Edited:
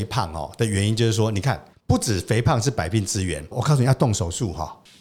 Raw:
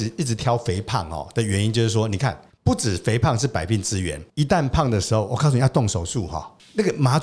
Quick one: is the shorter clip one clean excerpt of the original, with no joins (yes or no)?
no